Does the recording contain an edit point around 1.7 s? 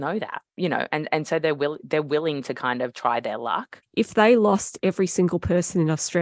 no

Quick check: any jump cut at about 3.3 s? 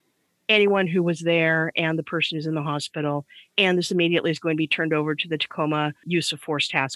no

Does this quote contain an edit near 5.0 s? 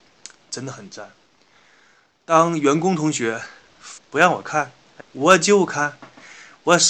yes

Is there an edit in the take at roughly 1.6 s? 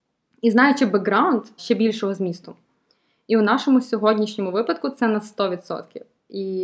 yes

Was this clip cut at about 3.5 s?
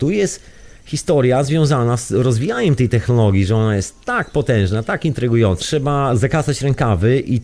no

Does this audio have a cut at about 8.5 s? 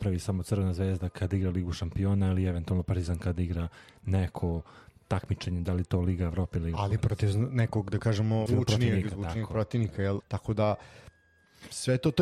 yes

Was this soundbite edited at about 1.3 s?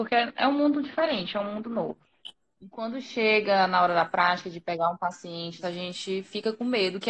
no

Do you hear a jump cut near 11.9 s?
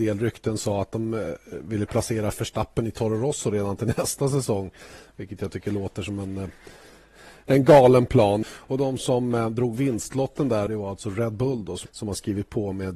yes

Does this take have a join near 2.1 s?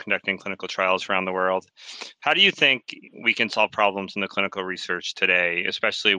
no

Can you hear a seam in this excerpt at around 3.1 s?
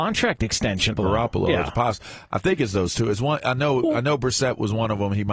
no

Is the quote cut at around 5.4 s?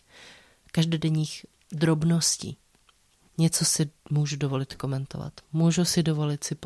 no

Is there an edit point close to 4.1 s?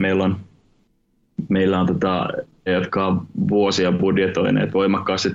no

